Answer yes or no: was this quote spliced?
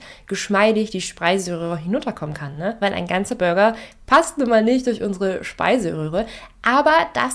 no